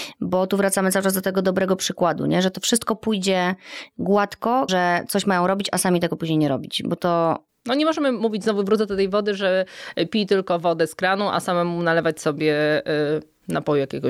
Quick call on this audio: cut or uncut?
cut